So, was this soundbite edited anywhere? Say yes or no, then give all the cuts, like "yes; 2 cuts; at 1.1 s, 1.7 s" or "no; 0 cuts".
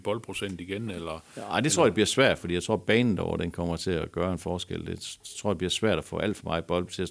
no; 0 cuts